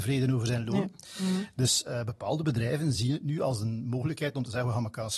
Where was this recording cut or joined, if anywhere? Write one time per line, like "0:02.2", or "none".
none